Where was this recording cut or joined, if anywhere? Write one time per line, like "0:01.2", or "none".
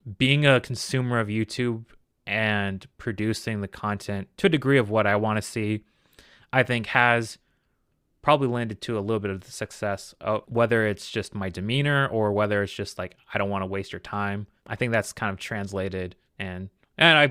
0:10.5